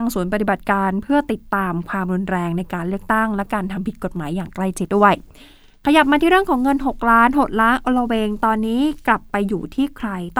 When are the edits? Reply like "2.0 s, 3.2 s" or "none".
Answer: 4.9 s